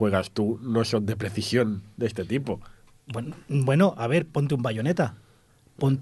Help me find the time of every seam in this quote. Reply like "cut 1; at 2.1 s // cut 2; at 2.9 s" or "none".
none